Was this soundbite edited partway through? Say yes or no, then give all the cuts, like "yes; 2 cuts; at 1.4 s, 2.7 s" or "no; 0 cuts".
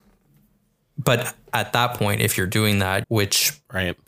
yes; 1 cut; at 3.0 s